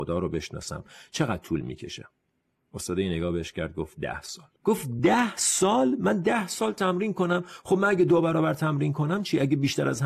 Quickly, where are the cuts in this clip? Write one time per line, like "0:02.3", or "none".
0:04.6